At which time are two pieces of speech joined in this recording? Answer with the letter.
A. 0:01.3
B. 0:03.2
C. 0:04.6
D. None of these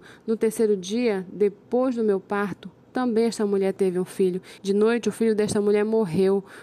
C